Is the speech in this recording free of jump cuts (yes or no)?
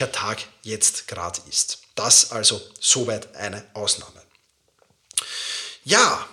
yes